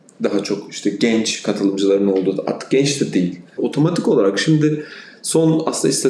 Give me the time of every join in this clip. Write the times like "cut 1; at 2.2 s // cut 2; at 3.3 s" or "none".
cut 1; at 3.6 s